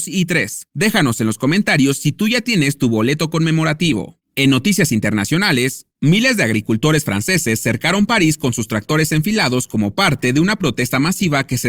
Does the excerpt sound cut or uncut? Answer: uncut